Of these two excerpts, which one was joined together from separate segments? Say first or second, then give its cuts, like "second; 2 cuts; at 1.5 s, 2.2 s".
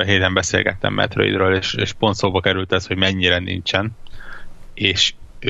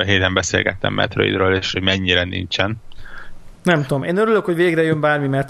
second; 2 cuts; at 1.7 s, 3.5 s